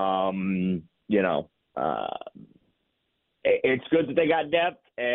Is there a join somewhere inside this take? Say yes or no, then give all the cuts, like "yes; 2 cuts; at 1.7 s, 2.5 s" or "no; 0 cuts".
no; 0 cuts